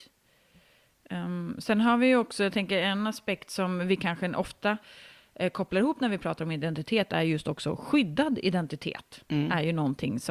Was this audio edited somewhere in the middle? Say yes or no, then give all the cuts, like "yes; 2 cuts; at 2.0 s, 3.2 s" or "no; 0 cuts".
no; 0 cuts